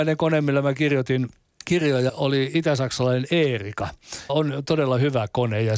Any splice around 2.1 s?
yes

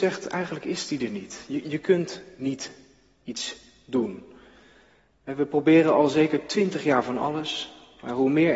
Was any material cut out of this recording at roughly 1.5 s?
no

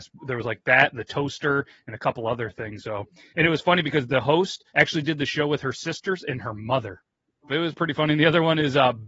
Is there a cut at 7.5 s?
yes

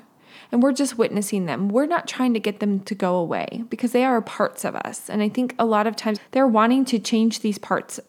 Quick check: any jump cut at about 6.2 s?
yes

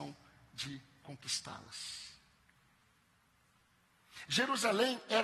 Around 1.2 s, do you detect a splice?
no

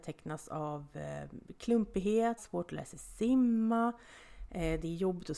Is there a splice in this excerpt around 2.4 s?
yes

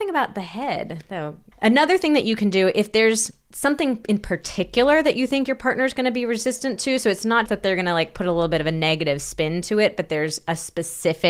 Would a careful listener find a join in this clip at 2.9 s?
no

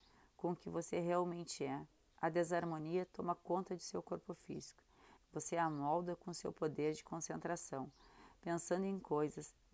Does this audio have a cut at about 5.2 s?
yes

